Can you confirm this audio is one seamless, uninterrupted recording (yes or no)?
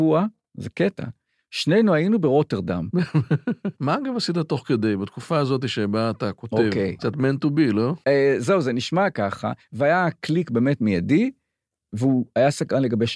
no